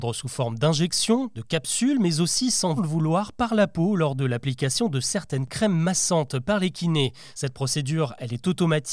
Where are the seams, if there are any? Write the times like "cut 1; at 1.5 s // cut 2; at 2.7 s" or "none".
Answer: cut 1; at 2.8 s // cut 2; at 7.3 s